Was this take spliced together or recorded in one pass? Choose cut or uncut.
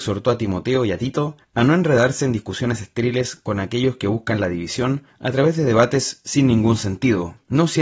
uncut